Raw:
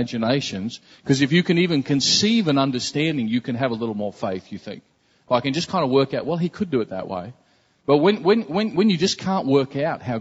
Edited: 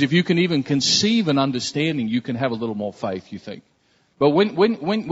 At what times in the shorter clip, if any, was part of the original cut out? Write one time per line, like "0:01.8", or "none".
0:04.0